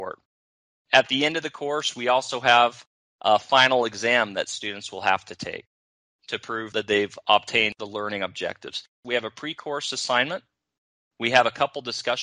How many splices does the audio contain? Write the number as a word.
one